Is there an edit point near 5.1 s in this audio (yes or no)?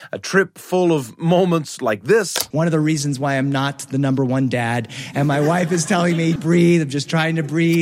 no